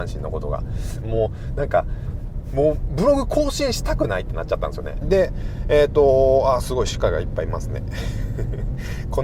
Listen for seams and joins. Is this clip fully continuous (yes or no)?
no